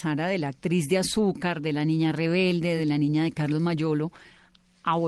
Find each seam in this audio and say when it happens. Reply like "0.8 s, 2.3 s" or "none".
none